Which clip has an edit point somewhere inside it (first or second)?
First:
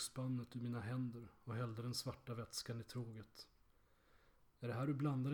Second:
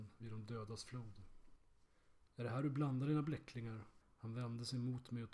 second